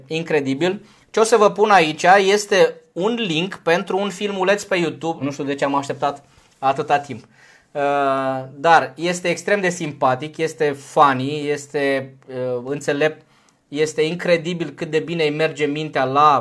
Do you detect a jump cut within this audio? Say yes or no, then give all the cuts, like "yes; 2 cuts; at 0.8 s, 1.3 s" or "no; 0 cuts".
yes; 1 cut; at 5.2 s